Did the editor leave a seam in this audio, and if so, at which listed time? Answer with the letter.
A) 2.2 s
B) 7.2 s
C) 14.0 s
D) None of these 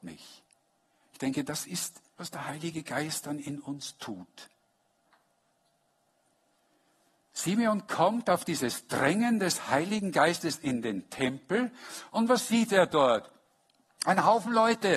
A